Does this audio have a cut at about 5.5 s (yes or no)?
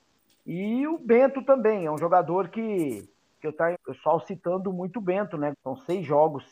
yes